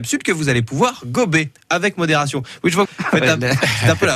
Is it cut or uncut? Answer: cut